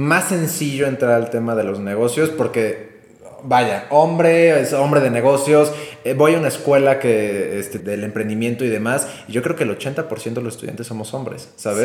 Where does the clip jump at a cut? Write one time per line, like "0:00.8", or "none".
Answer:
0:07.8